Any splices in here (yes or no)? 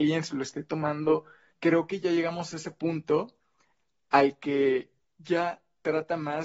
yes